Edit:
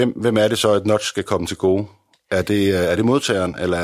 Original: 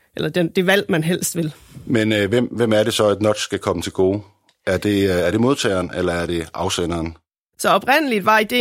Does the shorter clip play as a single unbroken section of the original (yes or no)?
yes